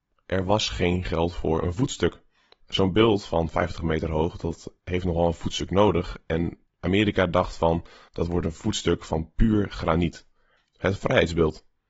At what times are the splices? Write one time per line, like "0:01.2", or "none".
0:08.1
0:10.6